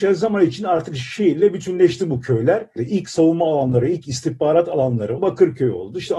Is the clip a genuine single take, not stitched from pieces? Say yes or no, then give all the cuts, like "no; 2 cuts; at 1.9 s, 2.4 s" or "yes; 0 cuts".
no; 2 cuts; at 2.8 s, 5.2 s